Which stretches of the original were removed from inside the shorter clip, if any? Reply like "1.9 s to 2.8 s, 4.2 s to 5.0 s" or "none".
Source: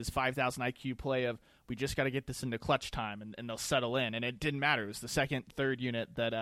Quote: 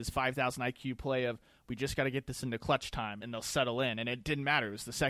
3.2 s to 3.4 s